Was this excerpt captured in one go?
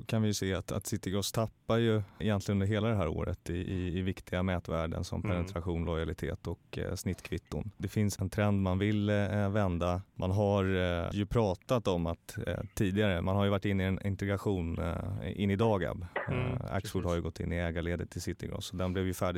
yes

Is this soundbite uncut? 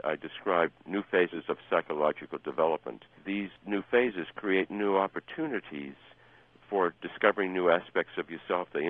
yes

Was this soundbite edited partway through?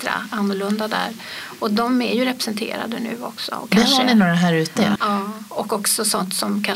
yes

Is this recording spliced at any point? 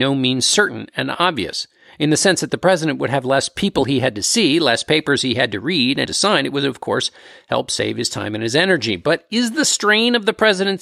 yes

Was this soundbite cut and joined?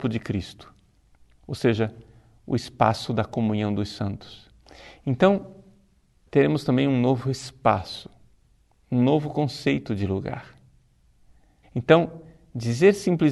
yes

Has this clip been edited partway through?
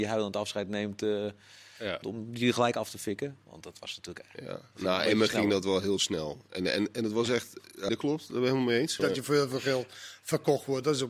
yes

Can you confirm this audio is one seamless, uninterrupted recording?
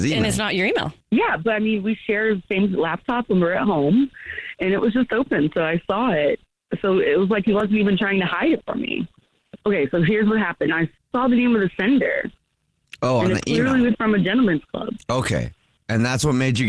no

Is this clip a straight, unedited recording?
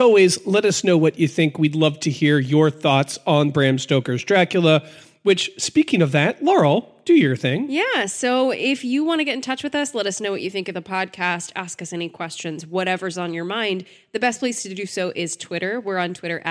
yes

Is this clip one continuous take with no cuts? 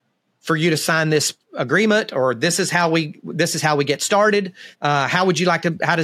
no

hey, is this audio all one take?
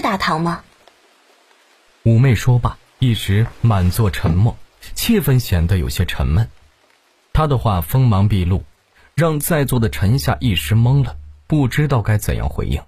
no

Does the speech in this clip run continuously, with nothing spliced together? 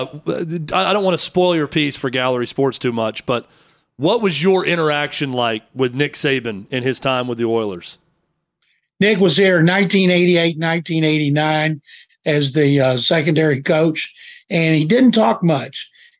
yes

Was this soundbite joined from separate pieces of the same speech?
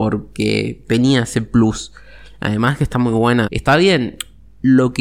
yes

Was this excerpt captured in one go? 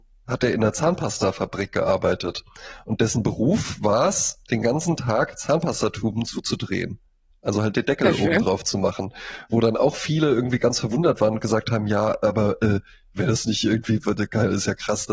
yes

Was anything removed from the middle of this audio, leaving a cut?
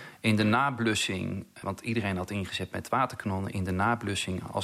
yes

